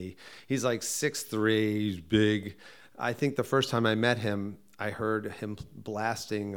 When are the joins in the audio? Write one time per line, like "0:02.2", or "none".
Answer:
none